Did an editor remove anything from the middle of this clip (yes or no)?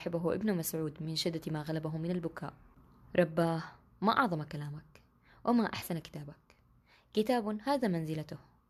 no